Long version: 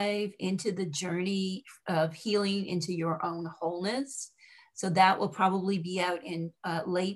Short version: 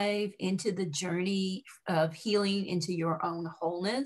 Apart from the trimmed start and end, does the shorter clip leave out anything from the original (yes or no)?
no